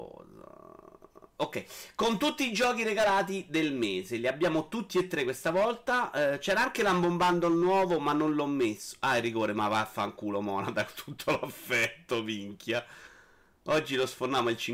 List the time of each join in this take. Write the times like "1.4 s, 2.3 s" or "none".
none